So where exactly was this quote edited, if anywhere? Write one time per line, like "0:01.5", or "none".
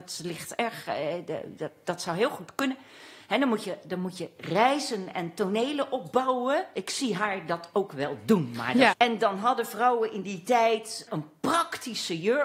0:08.9
0:11.1